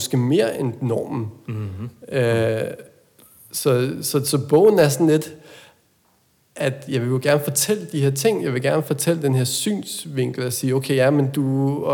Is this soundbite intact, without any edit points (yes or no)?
yes